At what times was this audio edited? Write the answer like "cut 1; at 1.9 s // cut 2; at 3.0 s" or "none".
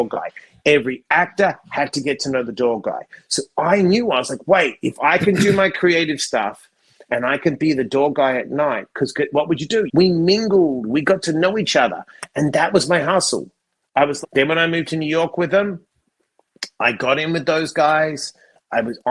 cut 1; at 9.9 s // cut 2; at 14.2 s